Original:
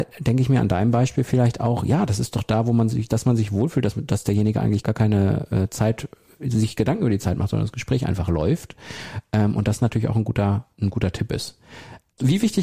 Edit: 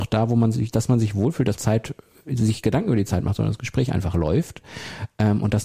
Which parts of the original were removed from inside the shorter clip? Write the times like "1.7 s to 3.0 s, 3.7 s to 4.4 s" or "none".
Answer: 3.9 s to 5.7 s